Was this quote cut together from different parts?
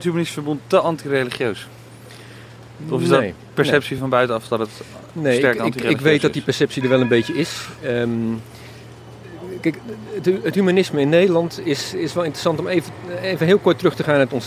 no; 0 cuts

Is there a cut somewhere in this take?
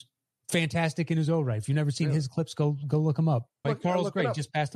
yes; 1 cut; at 3.6 s

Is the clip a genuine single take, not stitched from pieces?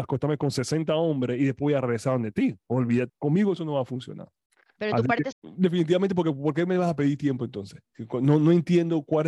no; 2 cuts; at 3.1 s, 5.3 s

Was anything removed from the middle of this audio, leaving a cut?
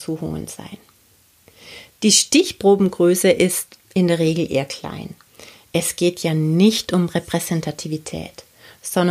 no; 0 cuts

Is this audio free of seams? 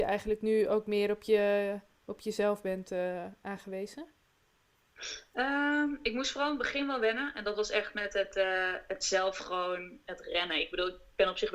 yes; 0 cuts

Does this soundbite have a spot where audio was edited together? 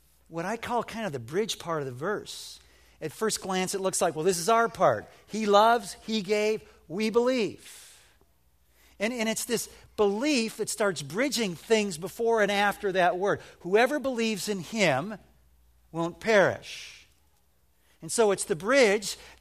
no; 0 cuts

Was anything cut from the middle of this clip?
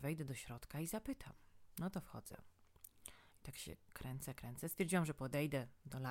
no; 0 cuts

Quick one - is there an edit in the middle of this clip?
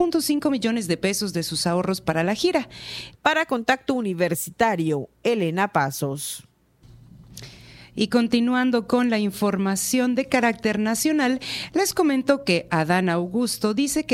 yes; 1 cut; at 3.1 s

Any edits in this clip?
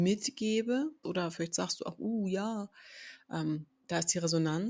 yes; 1 cut; at 1.0 s

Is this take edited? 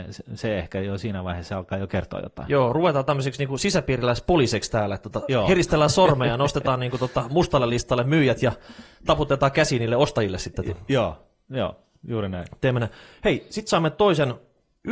no; 0 cuts

